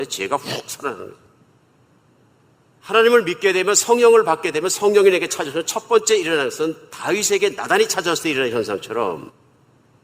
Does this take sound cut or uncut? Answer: cut